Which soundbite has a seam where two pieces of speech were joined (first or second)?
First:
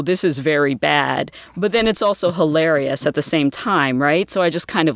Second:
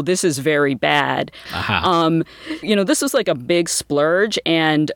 second